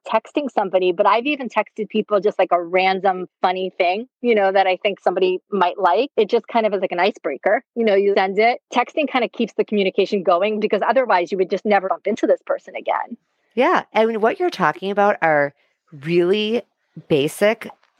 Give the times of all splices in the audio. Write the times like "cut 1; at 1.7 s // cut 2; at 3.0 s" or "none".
cut 1; at 8.1 s // cut 2; at 11.8 s

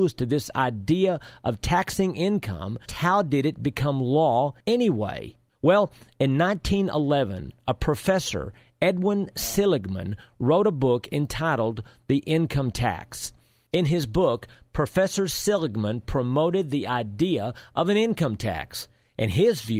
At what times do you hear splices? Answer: cut 1; at 2.9 s

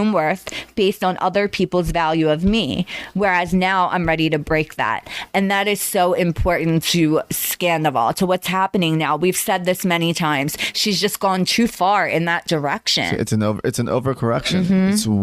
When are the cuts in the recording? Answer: none

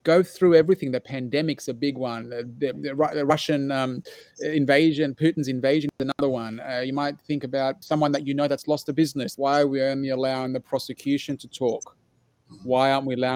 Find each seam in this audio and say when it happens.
cut 1; at 7.8 s // cut 2; at 9.3 s

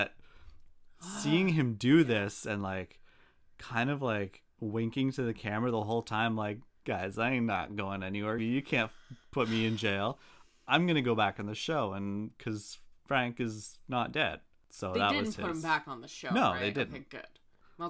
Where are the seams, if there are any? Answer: cut 1; at 8.4 s

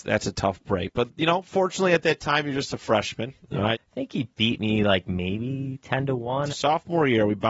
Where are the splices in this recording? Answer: cut 1; at 3.7 s // cut 2; at 6.5 s

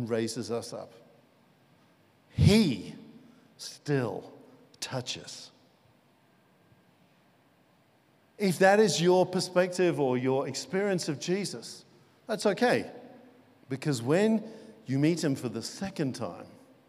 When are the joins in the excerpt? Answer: cut 1; at 8.2 s // cut 2; at 13.6 s

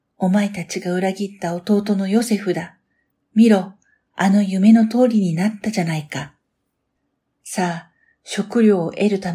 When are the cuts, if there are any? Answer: none

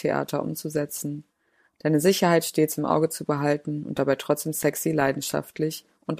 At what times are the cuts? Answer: none

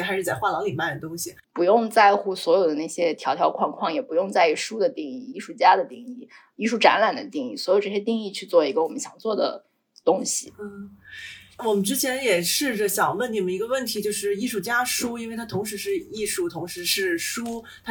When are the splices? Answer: cut 1; at 1.4 s

